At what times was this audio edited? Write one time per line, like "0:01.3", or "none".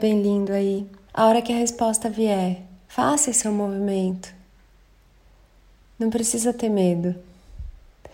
0:01.1